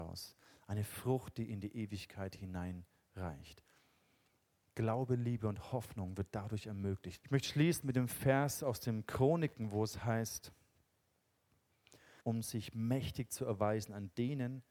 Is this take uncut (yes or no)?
no